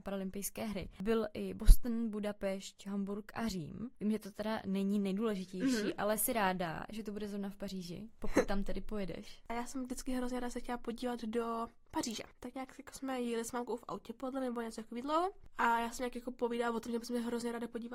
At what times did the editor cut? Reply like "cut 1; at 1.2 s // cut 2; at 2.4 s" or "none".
none